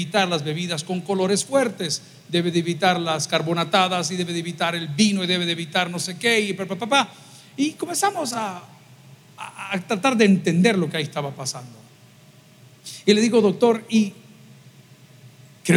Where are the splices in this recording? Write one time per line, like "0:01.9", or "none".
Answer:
none